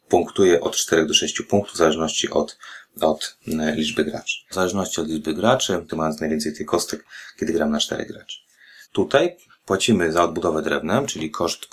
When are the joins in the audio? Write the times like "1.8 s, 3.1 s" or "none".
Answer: 4.5 s, 5.9 s, 8.8 s